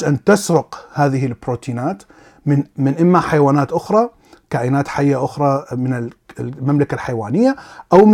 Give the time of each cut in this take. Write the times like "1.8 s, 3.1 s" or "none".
none